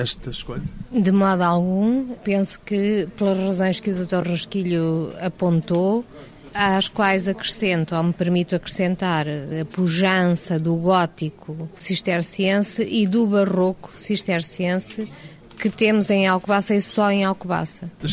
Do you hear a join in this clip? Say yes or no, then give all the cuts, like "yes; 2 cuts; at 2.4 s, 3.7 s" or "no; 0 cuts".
no; 0 cuts